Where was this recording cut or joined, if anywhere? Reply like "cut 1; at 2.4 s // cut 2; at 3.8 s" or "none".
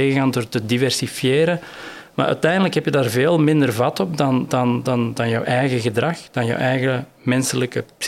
none